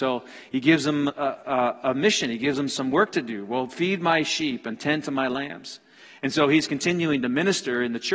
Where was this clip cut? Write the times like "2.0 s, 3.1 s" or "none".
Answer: 1.1 s